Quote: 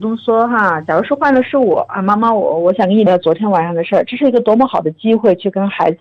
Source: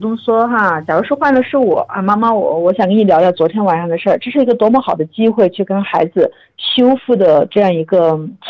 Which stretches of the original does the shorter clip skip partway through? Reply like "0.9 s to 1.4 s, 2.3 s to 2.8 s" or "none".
3.1 s to 3.2 s